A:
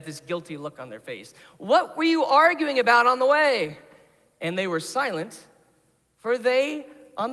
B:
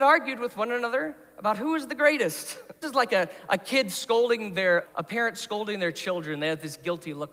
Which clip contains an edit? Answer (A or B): B